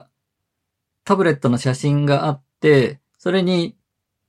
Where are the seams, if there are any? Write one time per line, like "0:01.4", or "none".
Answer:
0:03.1